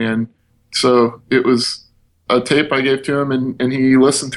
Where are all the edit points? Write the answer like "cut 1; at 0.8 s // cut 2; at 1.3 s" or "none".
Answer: none